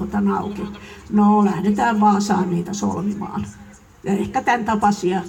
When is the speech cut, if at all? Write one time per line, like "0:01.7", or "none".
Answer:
none